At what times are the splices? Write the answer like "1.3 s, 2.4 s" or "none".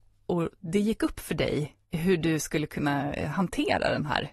1.8 s